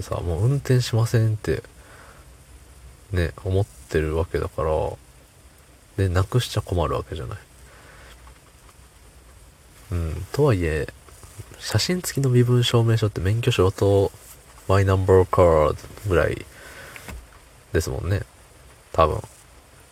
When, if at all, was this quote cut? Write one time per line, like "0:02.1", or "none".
none